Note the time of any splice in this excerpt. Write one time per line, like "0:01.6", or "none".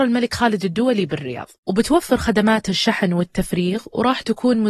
0:01.6